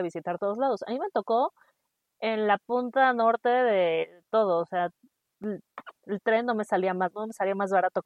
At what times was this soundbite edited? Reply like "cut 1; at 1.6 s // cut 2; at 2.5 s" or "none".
cut 1; at 7.1 s